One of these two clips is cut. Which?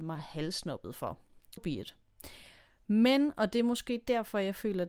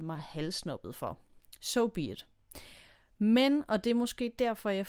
first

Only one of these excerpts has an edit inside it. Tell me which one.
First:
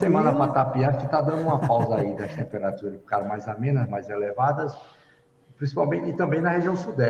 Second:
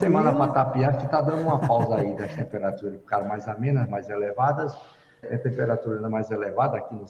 second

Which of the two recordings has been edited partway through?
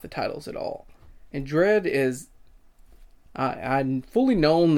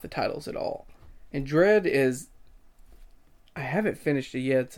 first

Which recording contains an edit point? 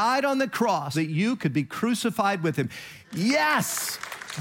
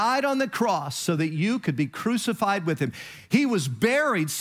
first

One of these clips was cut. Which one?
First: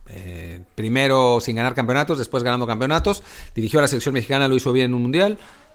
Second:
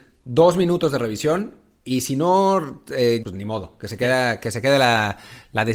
second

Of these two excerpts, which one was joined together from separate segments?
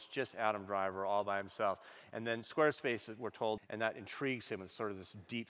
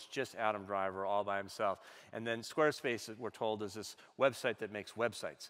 first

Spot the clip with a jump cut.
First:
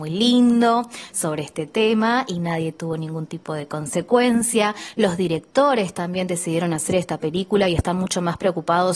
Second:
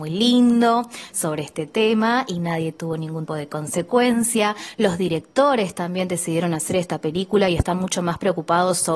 second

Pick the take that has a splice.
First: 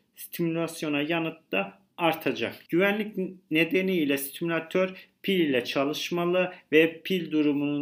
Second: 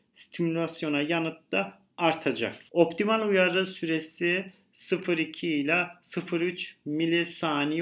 first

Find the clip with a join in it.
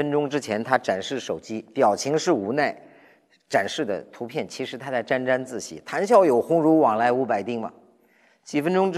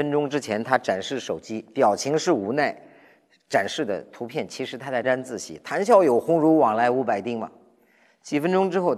second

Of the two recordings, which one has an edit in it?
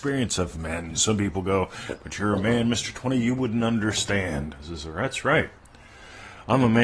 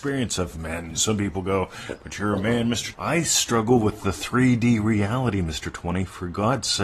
second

